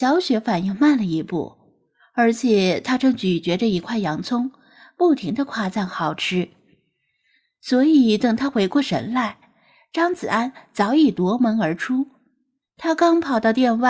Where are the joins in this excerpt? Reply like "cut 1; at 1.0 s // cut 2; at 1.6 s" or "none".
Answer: none